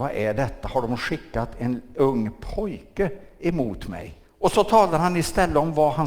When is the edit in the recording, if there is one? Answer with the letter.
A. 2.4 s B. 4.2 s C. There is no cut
B